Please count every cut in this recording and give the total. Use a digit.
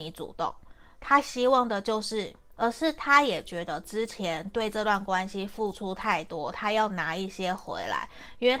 1